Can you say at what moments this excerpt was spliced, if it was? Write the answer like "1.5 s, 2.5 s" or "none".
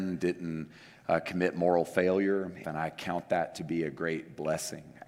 2.6 s